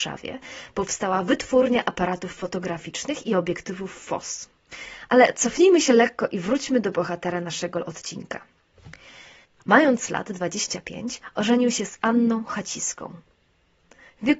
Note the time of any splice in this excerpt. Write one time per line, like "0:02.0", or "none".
0:09.6